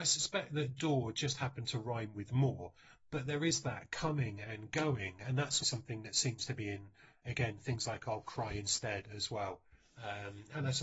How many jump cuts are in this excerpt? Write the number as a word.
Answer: one